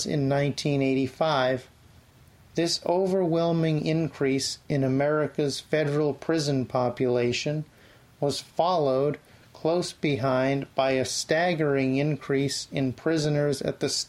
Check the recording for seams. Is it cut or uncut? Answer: uncut